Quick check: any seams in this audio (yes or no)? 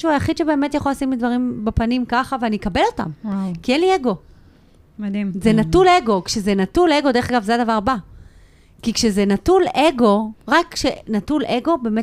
no